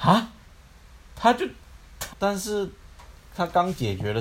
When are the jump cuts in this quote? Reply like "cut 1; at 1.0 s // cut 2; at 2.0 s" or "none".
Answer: cut 1; at 2.1 s